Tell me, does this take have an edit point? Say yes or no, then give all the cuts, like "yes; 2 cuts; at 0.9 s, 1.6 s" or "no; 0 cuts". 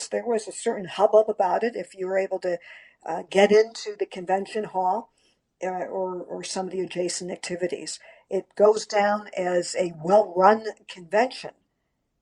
no; 0 cuts